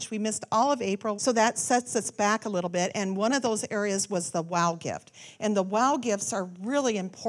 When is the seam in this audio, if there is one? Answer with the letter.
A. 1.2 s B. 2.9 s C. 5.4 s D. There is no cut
A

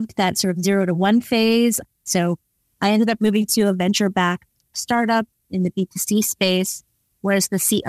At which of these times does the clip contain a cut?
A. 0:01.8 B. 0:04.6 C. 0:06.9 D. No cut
A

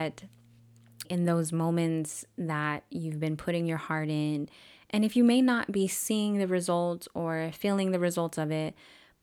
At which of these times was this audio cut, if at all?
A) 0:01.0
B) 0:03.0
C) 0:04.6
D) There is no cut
A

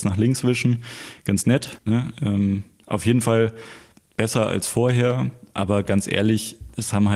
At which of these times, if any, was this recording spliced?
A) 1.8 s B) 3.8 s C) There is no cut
A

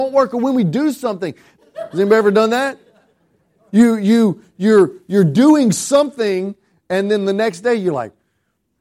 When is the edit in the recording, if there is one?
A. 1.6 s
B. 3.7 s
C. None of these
A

